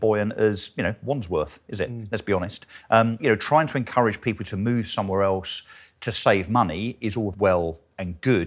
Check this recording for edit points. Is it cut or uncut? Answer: cut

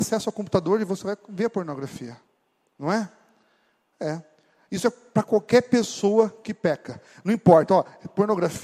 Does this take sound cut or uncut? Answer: uncut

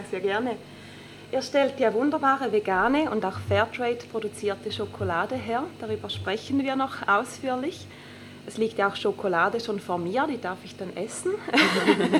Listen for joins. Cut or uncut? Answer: uncut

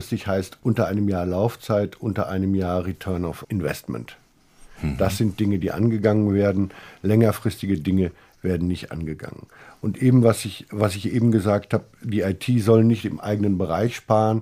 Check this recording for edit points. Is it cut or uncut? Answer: uncut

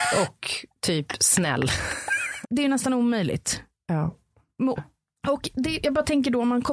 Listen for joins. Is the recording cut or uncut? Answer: cut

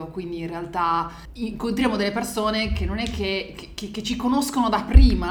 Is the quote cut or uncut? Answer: uncut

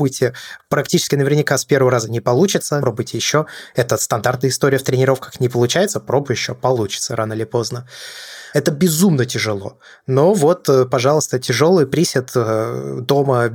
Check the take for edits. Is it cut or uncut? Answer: cut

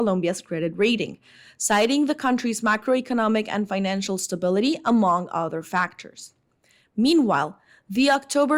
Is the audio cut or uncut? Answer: uncut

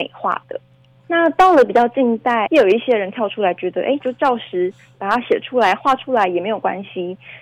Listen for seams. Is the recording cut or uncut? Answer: cut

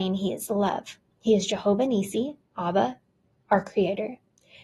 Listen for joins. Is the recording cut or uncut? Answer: cut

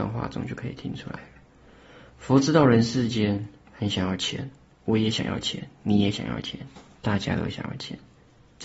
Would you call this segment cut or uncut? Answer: uncut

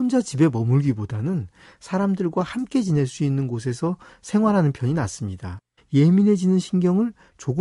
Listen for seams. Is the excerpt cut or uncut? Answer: cut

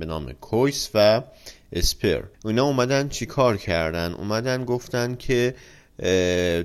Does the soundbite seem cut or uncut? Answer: cut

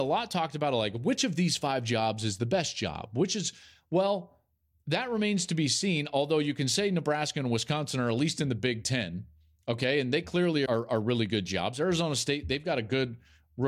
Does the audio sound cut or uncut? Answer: cut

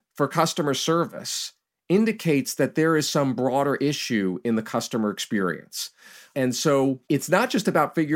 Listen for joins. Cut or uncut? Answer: cut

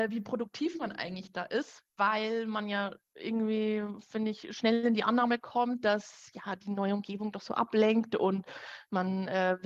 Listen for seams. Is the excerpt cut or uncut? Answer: cut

